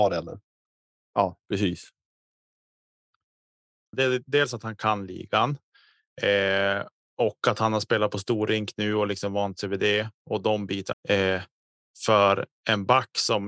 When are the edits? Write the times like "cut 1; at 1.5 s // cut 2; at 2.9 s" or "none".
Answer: cut 1; at 3.9 s // cut 2; at 10.9 s